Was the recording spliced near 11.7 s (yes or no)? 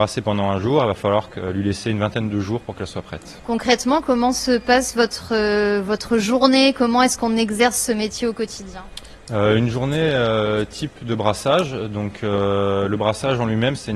no